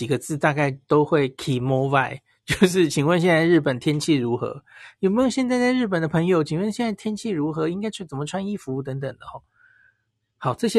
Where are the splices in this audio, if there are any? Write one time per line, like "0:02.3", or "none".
none